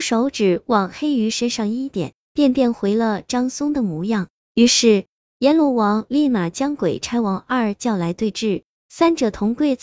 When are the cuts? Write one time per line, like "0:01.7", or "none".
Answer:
none